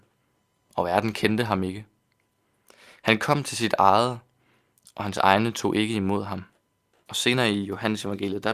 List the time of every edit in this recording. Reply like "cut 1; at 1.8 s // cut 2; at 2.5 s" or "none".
cut 1; at 7.1 s

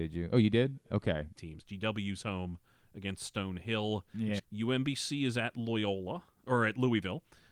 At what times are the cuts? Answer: cut 1; at 1.4 s // cut 2; at 4.4 s

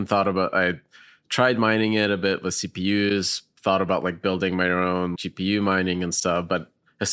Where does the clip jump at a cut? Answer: cut 1; at 5.2 s

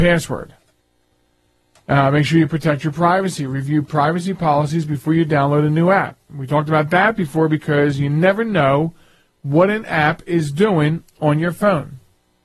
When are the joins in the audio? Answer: none

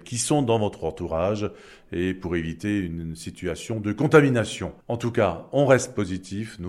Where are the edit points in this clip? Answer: cut 1; at 4.8 s

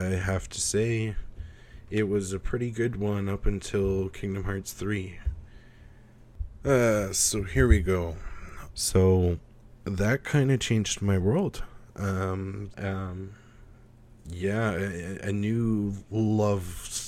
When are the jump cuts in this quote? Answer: cut 1; at 8.7 s // cut 2; at 12.7 s // cut 3; at 14.2 s

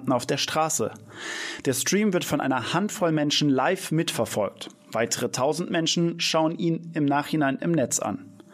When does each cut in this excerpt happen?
cut 1; at 1.6 s

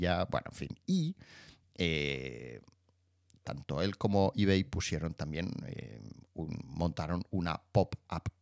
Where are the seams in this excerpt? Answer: none

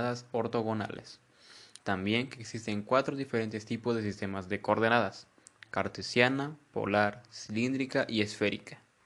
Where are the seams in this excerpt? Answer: cut 1; at 1.8 s

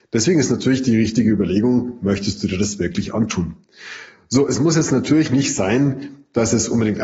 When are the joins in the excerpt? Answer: none

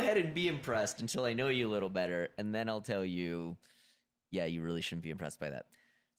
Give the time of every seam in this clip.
none

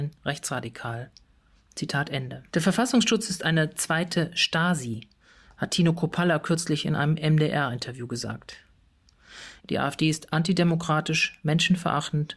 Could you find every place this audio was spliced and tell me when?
cut 1; at 2.5 s // cut 2; at 9.6 s

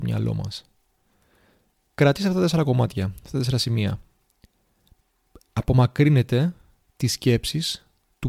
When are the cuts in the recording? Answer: none

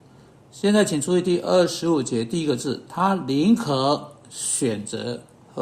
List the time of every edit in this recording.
none

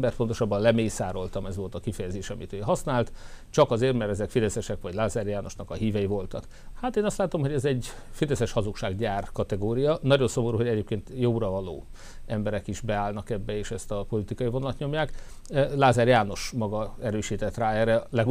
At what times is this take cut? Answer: cut 1; at 6.7 s

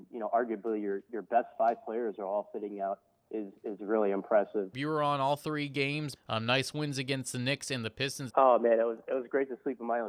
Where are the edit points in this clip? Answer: cut 1; at 4.7 s // cut 2; at 6.2 s // cut 3; at 8.3 s

